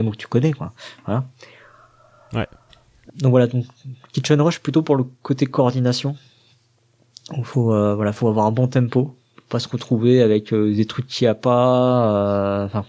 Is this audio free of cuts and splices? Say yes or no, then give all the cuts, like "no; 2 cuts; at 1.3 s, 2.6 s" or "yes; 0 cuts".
no; 1 cut; at 3.1 s